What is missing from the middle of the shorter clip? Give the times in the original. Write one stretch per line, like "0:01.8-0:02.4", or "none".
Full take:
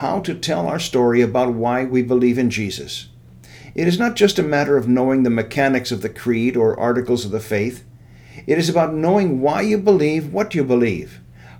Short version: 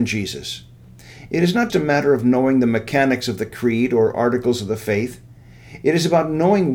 0:04.1-0:04.3